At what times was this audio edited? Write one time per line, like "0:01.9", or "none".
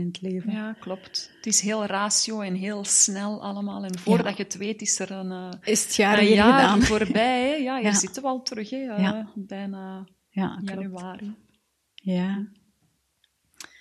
none